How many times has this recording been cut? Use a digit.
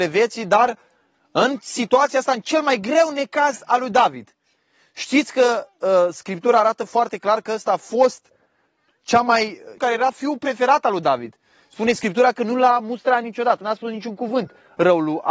1